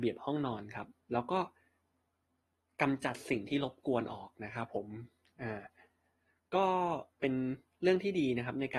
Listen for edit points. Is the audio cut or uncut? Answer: cut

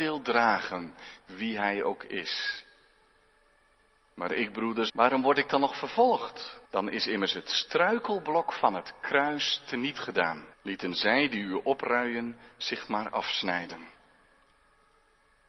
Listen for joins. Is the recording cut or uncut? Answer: cut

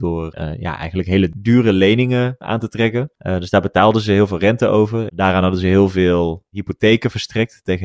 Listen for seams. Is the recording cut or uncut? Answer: cut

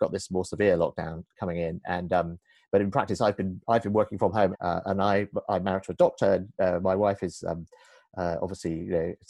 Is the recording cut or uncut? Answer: cut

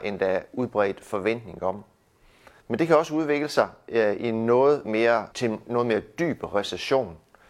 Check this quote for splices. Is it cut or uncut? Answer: cut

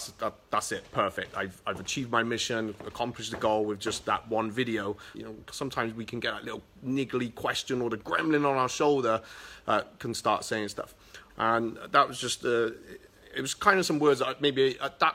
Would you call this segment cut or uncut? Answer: cut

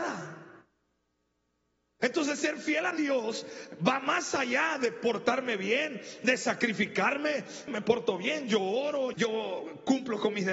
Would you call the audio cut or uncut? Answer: cut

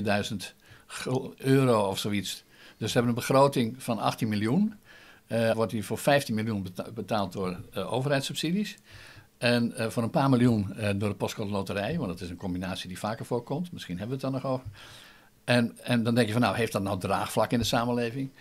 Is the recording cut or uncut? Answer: cut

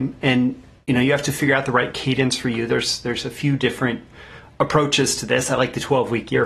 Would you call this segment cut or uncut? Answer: uncut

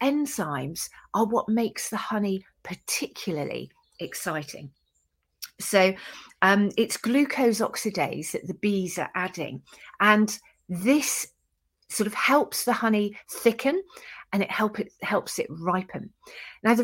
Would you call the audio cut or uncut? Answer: uncut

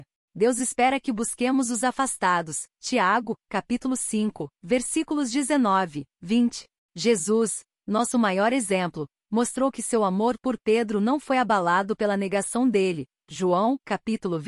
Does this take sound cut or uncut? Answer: uncut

